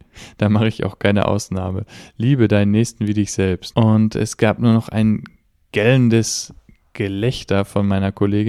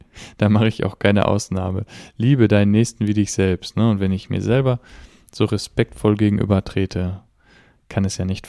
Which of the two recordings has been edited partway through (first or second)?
first